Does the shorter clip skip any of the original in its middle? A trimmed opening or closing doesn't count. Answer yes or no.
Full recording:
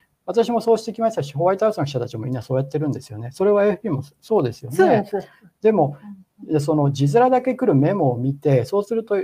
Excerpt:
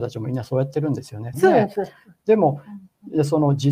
yes